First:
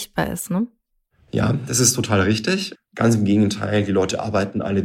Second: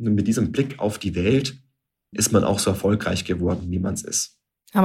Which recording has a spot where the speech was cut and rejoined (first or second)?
first